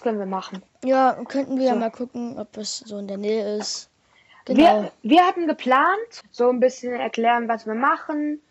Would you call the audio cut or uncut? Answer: cut